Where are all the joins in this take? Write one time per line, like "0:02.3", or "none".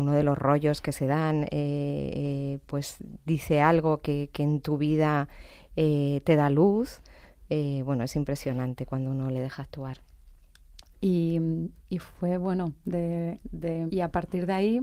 0:10.9
0:13.9